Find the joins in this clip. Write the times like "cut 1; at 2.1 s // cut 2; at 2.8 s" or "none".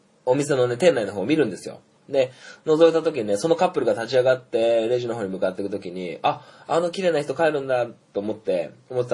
none